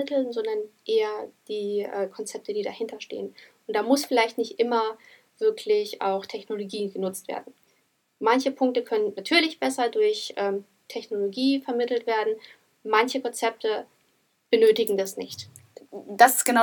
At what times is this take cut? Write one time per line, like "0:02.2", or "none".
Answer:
none

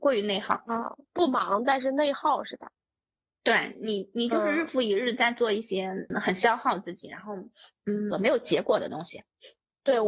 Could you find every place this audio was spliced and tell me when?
0:06.1
0:08.1

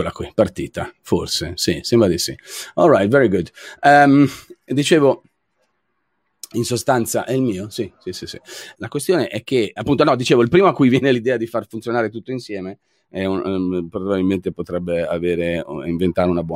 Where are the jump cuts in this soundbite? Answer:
0:08.7
0:09.8

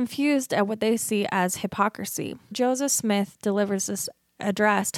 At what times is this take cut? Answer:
0:02.5

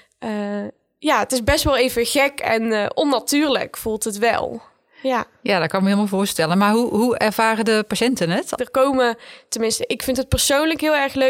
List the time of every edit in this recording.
0:08.6

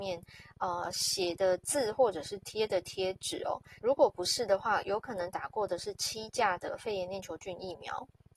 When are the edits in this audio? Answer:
0:03.8

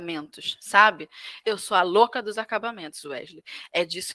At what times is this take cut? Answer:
0:01.4

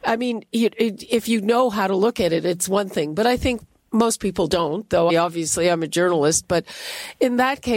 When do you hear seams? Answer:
0:05.1

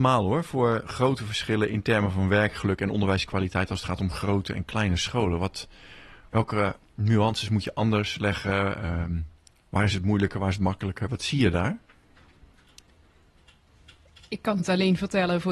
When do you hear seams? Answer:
none

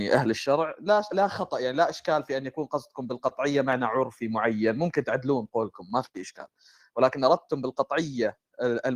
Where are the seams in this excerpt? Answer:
0:01.1

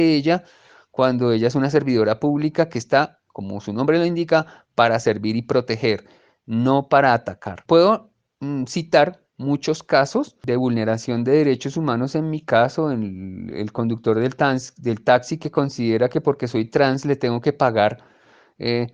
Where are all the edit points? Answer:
0:13.5

